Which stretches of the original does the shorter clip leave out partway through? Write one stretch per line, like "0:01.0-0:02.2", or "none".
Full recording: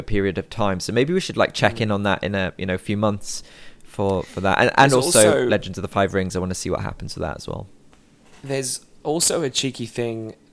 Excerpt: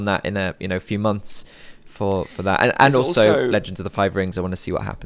none